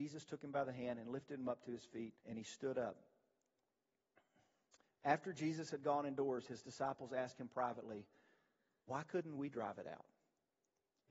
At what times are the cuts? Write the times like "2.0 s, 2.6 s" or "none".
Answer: 2.2 s